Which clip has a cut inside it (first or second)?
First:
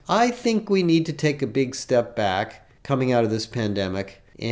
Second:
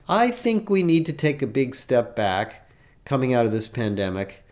first